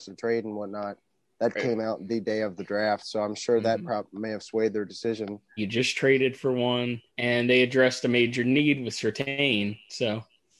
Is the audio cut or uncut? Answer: cut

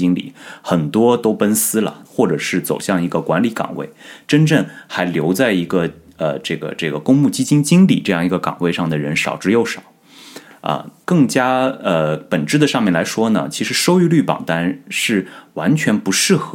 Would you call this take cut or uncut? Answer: cut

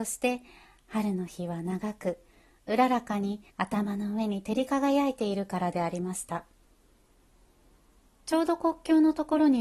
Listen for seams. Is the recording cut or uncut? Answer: cut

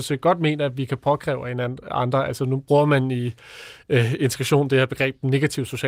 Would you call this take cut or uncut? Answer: uncut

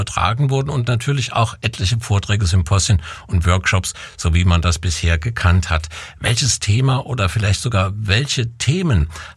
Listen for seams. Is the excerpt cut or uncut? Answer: uncut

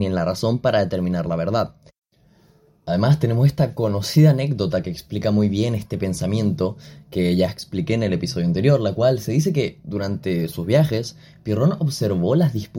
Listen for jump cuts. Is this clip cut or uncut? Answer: uncut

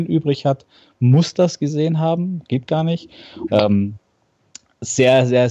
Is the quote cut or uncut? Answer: cut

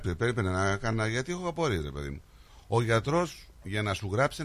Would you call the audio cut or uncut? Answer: uncut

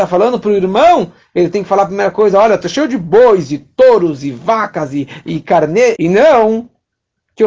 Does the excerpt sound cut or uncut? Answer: cut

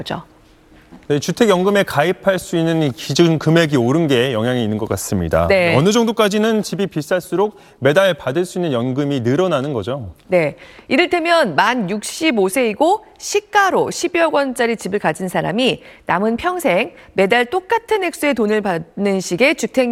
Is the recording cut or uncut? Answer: uncut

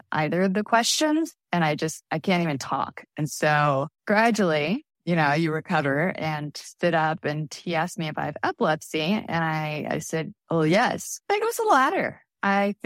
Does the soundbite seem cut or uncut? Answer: cut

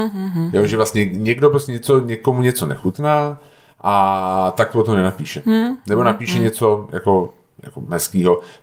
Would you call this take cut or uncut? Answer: uncut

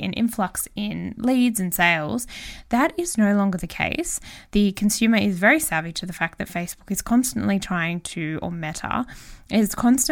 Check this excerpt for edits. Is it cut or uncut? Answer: cut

